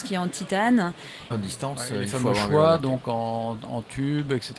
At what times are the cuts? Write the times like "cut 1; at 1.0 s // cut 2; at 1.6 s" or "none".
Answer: cut 1; at 1.3 s